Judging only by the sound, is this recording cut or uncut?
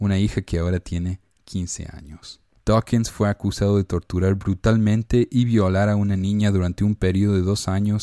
cut